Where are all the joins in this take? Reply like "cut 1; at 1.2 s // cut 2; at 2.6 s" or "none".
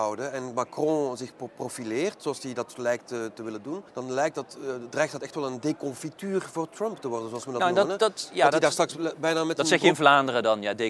cut 1; at 3.9 s